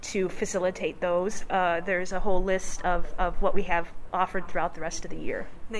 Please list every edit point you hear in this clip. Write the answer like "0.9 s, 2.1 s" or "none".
1.5 s

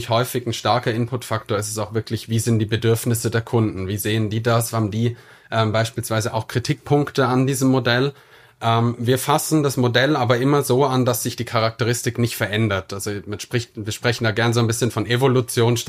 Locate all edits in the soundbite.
none

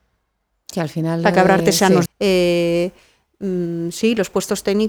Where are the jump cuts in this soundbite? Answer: 2.1 s

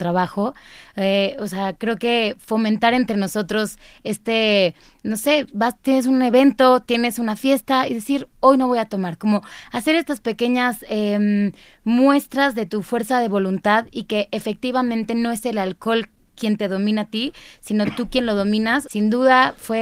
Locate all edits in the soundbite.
5.5 s, 18.8 s

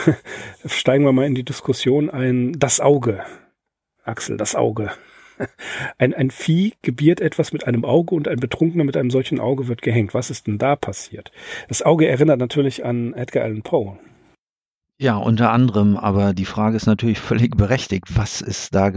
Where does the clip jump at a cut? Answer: none

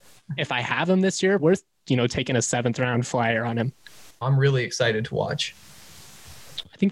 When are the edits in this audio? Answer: 1.4 s, 4.2 s

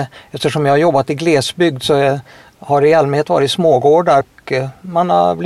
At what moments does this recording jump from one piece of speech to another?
4.2 s

